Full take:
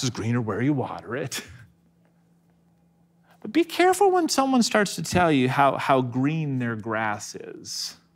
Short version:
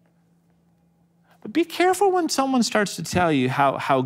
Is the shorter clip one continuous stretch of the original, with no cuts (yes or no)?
yes